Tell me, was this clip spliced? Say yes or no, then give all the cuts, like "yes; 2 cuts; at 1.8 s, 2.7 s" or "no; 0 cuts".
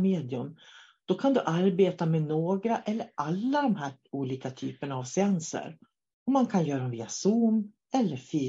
no; 0 cuts